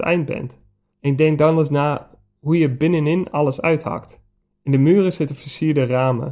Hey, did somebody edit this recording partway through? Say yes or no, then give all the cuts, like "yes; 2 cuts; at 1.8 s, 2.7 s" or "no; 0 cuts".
yes; 2 cuts; at 0.9 s, 4.4 s